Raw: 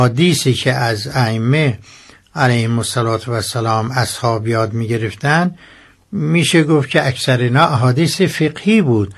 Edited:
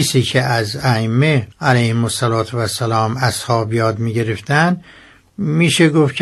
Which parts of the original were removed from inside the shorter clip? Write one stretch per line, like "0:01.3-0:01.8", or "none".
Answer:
0:01.8-0:02.3